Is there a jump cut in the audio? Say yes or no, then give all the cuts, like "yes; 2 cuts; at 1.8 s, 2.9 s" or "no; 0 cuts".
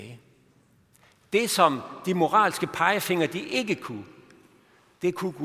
no; 0 cuts